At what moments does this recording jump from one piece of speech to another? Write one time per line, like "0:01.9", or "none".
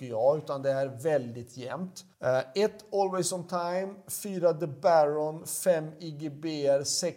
0:02.1